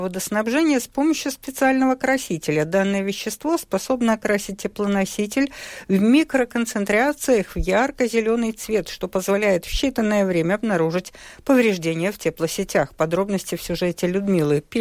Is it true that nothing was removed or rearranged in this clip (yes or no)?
yes